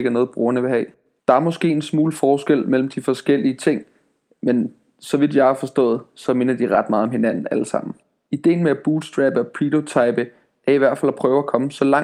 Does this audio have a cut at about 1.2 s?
yes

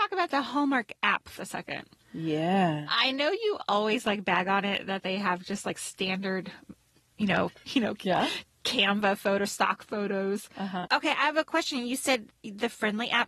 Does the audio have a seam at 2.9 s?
no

